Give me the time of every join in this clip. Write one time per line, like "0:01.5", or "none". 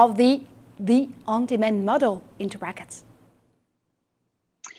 none